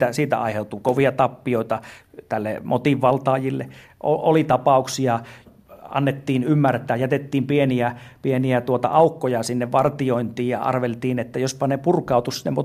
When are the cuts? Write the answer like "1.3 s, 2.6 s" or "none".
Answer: 5.5 s